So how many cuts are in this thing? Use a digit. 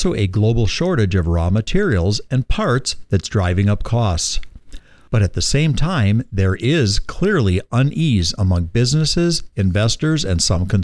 1